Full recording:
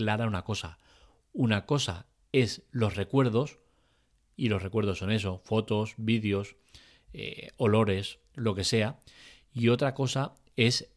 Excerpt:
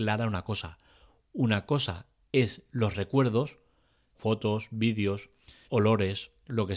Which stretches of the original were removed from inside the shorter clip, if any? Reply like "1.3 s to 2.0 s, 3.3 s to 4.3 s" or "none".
4.1 s to 5.4 s, 6.9 s to 7.5 s